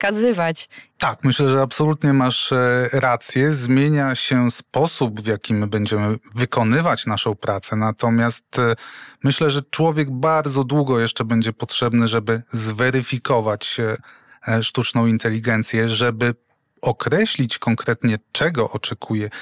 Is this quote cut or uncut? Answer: cut